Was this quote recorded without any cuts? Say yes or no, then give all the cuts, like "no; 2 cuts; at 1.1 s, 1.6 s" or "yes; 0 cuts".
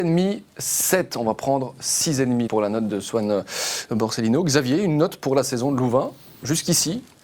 no; 1 cut; at 2.5 s